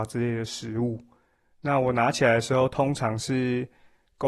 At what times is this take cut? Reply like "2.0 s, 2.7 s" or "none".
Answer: none